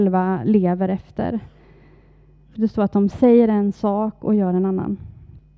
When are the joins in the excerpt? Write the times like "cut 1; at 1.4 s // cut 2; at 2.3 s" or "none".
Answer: cut 1; at 2.6 s